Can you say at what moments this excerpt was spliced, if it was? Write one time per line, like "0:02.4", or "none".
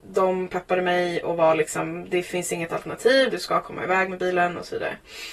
0:03.3